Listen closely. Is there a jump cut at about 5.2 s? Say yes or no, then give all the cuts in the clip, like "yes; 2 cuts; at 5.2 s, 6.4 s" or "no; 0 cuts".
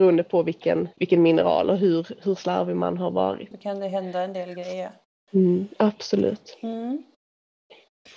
no; 2 cuts; at 0.9 s, 3.5 s